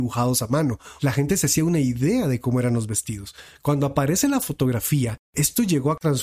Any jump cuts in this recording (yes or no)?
yes